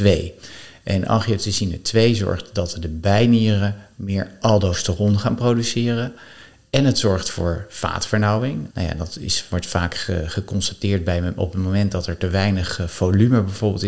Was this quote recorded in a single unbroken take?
no; 1 cut; at 8.7 s

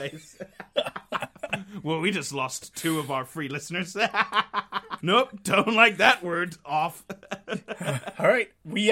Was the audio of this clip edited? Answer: yes; 1 cut; at 5.0 s

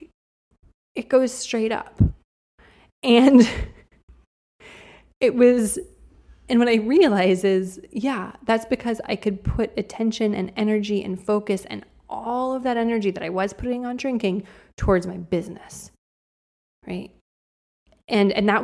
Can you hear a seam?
no; 0 cuts

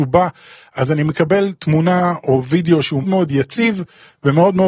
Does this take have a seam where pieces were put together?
yes; 1 cut; at 3.0 s

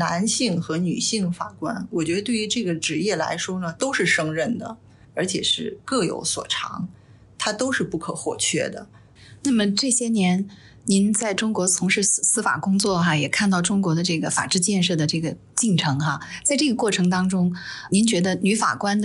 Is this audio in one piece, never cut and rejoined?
yes; 0 cuts

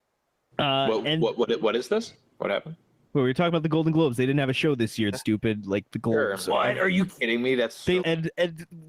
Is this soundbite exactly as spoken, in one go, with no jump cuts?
no; 3 cuts; at 5.1 s, 6.5 s, 8.0 s

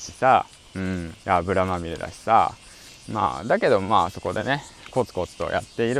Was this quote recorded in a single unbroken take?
no; 1 cut; at 1.2 s

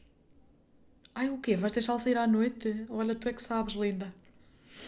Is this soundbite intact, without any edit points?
yes; 0 cuts

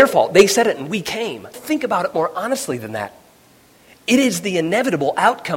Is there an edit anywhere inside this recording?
yes; 1 cut; at 1.5 s

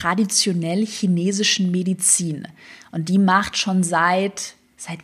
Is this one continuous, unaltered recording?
yes; 0 cuts

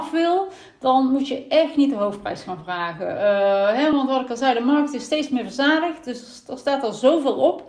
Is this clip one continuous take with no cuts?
yes; 0 cuts

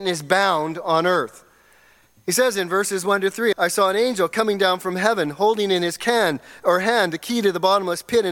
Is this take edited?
yes; 1 cut; at 3.5 s

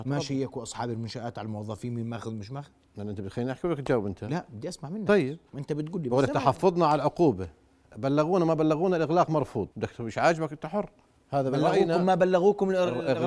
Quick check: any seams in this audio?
yes; 1 cut; at 9.7 s

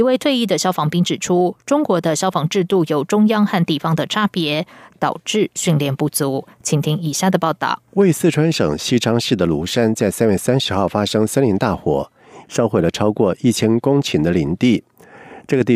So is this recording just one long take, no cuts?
no; 3 cuts; at 4.9 s, 7.9 s, 12.4 s

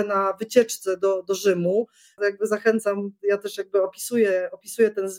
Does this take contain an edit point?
yes; 1 cut; at 2.2 s

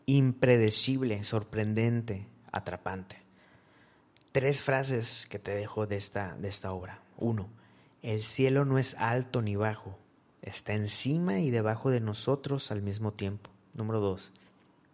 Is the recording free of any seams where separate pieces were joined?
yes; 0 cuts

